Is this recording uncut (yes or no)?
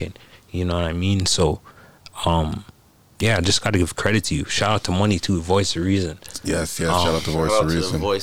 yes